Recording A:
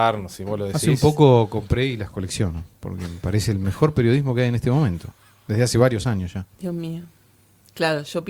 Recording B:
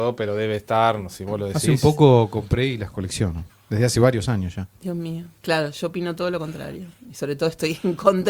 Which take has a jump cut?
B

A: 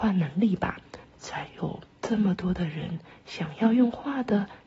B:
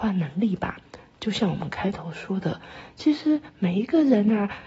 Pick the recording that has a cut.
A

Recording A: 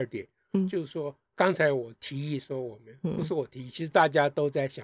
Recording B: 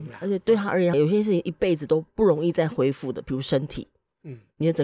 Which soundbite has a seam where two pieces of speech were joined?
B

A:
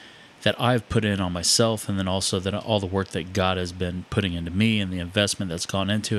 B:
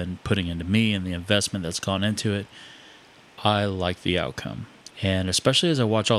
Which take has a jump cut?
B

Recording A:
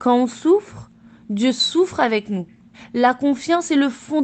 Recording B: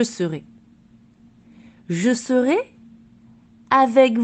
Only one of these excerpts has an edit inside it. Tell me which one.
A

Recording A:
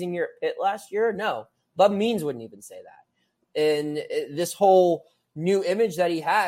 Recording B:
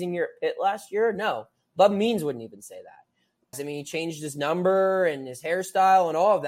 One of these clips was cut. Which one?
B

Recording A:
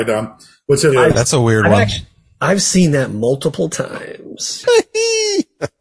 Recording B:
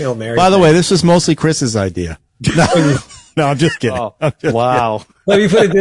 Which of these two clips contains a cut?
A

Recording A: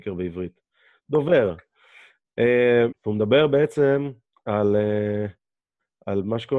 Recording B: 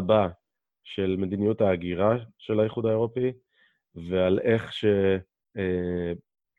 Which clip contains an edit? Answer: A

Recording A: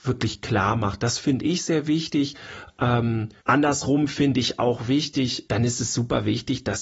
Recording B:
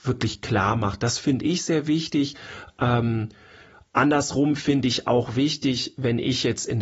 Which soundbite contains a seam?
A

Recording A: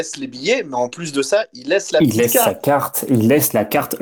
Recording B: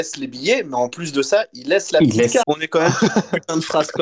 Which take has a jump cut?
B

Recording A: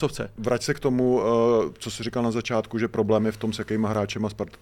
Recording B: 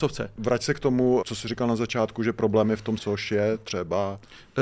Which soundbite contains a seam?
B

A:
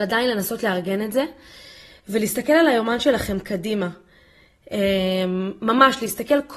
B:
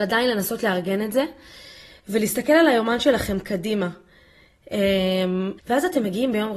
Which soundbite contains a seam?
B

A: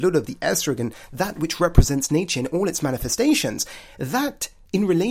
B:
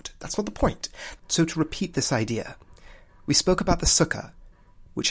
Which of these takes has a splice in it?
B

